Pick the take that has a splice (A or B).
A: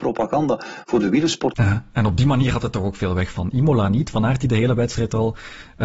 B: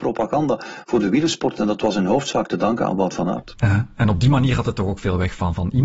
A